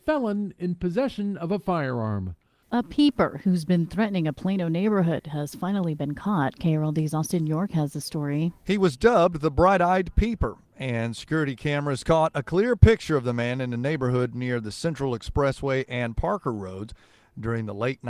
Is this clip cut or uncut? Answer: cut